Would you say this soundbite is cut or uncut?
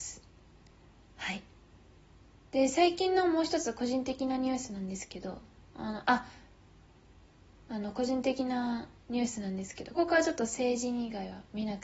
cut